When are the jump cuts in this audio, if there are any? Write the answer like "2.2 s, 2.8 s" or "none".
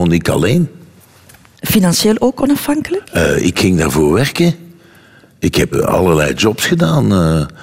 5.7 s

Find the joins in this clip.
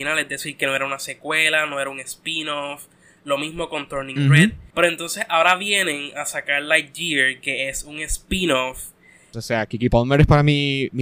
4.7 s, 9.3 s

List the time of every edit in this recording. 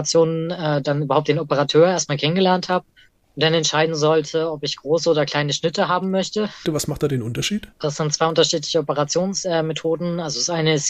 6.6 s, 7.7 s

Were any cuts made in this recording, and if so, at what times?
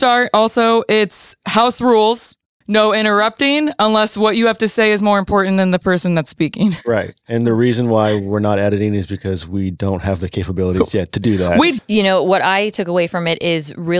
2.6 s, 11.8 s

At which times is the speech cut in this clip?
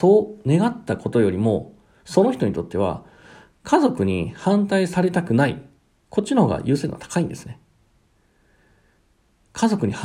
none

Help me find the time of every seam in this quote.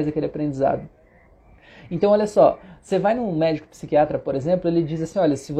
none

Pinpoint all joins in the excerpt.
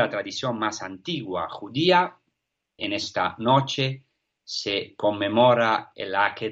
2.8 s

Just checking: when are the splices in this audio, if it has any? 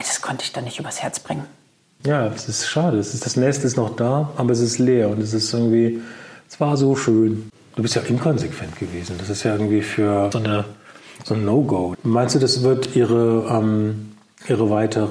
2.0 s, 10.3 s, 11.9 s

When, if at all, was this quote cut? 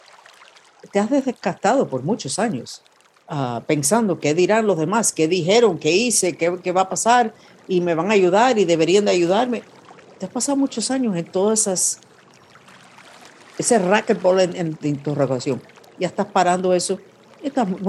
14.8 s

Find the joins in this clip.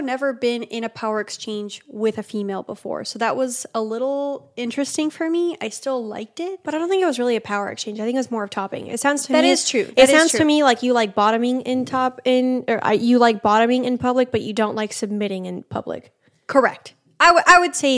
none

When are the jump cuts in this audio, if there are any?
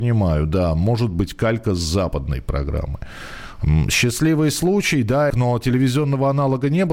5.3 s

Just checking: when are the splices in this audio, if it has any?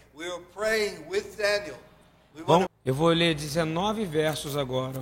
2.7 s

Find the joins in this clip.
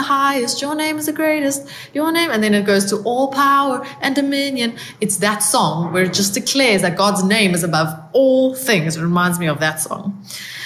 none

